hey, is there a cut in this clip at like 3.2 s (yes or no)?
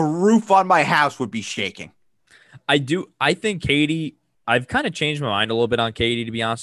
no